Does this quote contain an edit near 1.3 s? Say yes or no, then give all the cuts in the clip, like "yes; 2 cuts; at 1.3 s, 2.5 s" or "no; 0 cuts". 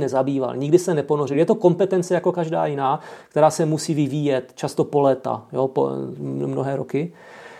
no; 0 cuts